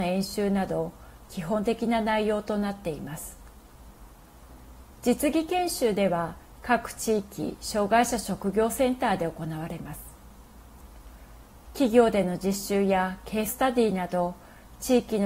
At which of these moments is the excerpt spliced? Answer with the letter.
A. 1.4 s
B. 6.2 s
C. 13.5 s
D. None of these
C